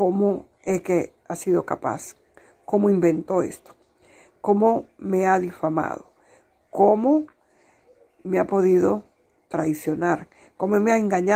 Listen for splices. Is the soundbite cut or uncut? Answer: uncut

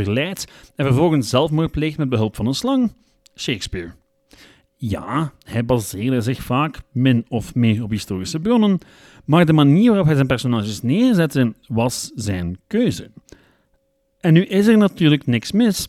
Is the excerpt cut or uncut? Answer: uncut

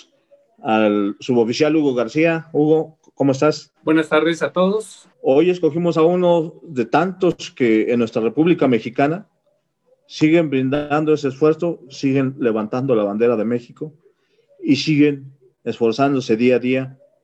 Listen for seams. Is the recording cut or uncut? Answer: cut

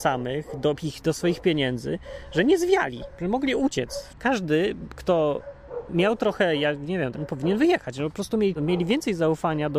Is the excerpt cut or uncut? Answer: cut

